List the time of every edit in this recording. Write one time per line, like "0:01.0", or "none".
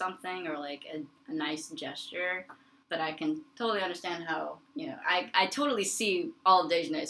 0:02.8